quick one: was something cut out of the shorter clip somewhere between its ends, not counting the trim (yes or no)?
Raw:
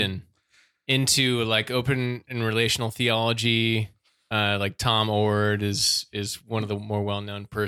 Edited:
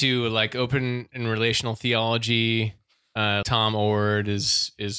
yes